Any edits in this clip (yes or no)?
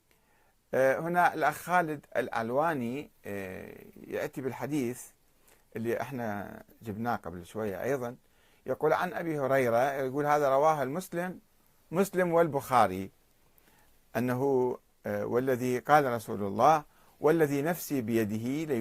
no